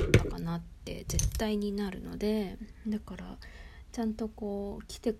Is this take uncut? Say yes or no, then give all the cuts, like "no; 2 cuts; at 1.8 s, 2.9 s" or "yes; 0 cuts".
yes; 0 cuts